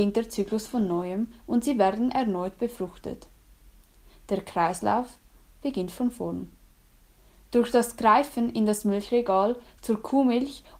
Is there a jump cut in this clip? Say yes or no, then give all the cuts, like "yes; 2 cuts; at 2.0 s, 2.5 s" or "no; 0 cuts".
no; 0 cuts